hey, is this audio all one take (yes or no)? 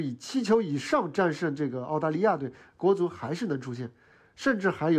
yes